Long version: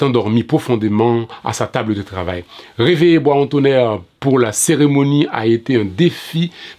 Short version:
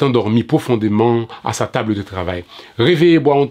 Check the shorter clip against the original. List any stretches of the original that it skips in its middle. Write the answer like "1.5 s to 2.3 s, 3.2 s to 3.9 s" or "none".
none